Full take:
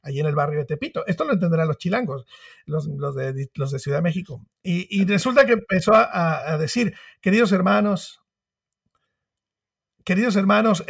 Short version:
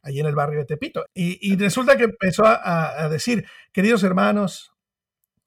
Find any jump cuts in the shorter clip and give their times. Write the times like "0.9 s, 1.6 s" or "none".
1.1 s